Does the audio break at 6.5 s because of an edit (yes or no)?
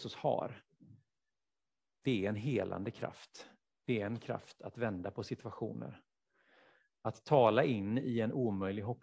no